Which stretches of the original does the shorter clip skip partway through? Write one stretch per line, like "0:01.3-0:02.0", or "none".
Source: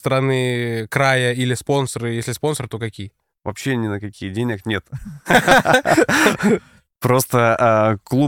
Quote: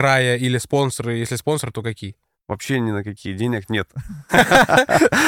none

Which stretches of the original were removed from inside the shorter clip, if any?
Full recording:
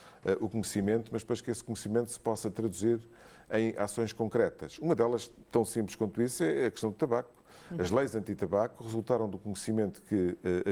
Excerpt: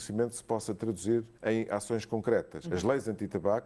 0:03.1-0:03.4
0:04.7-0:07.7

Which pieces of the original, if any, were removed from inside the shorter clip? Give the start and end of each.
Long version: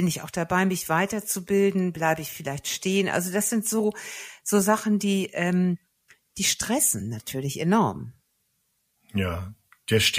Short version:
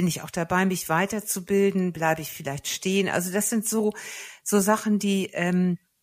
none

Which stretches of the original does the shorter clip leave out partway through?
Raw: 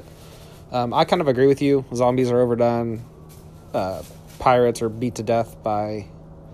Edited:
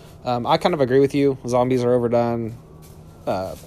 none

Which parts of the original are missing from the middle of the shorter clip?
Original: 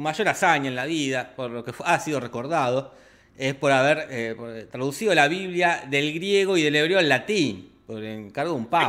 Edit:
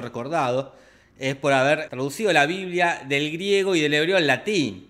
0:04.1-0:04.7

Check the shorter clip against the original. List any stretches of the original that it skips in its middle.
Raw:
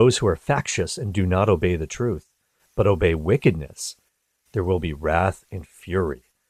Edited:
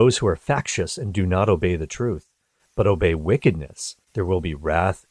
0:04.0-0:04.4

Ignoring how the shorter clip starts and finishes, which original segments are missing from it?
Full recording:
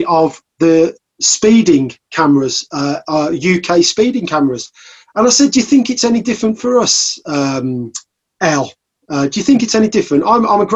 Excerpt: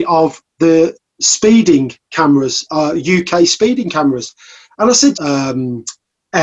0:02.7-0:03.0
0:05.5-0:07.2

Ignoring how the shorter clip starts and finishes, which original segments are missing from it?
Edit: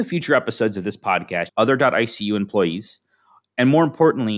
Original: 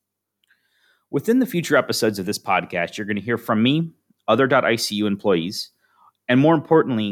0:02.9-0:04.2

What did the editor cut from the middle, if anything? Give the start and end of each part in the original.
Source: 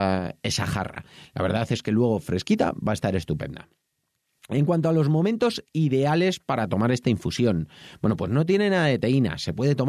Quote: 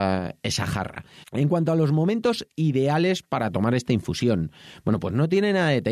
0:01.2-0:04.4

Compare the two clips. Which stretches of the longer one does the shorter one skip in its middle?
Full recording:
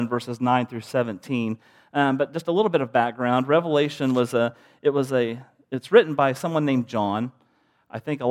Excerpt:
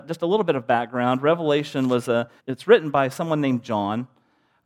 0:04.6-0:05.6

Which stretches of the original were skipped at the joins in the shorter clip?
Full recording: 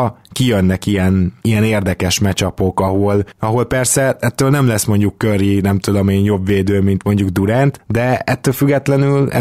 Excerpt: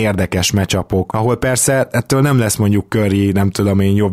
0:02.8-0:03.4

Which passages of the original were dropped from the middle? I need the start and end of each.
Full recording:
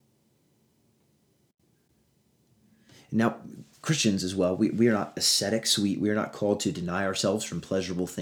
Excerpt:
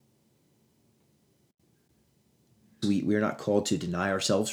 0:02.8-0:05.8

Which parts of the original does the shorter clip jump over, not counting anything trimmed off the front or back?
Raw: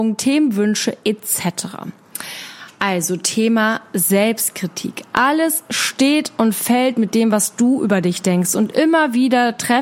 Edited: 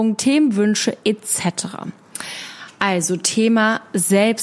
none

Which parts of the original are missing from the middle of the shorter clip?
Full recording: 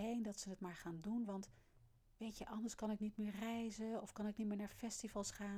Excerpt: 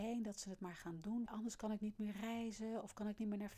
0:01.3-0:02.4

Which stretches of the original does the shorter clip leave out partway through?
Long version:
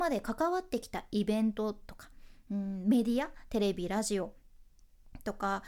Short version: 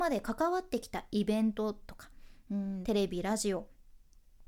0:02.8-0:03.5

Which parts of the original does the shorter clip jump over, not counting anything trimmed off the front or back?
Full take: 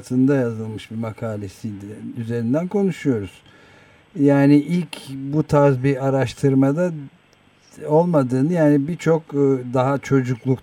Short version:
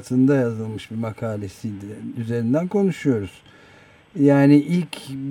none

